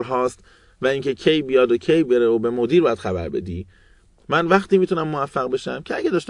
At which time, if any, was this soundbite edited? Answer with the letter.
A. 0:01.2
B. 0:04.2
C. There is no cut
A